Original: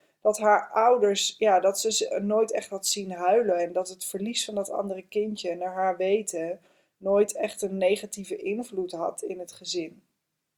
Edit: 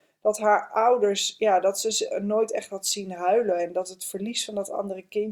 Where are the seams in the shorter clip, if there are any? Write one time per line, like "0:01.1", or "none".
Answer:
none